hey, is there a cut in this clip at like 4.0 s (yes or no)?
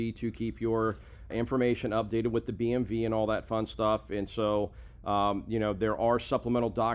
no